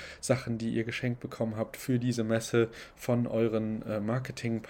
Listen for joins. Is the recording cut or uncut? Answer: uncut